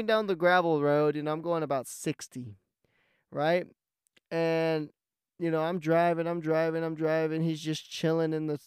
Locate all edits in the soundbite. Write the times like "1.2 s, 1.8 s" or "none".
none